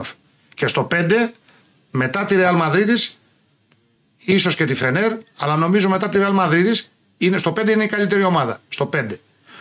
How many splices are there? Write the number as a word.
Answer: zero